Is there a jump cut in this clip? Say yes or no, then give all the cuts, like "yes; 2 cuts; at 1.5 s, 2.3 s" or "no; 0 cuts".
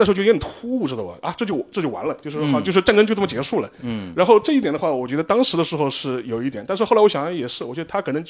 no; 0 cuts